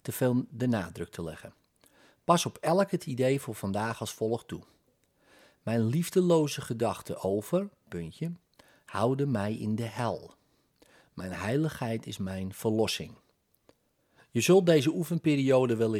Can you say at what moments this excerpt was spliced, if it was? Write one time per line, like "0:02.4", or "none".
0:07.9